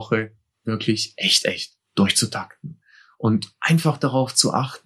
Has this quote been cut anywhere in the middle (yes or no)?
no